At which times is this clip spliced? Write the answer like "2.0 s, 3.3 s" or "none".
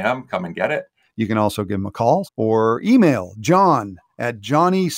1.0 s, 2.2 s